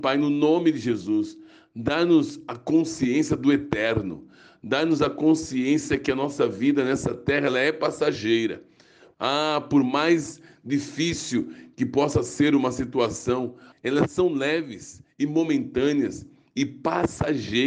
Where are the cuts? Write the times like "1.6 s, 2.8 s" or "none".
9.1 s, 13.7 s